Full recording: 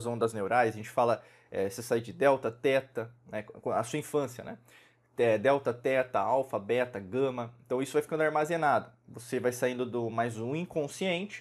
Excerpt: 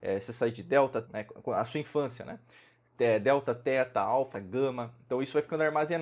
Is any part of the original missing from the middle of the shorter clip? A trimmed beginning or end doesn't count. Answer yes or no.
yes